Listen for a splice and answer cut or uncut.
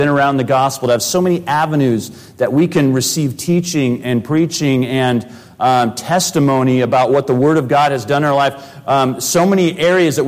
uncut